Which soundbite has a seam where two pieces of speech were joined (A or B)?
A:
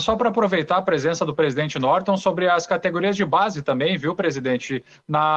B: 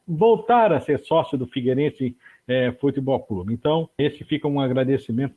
B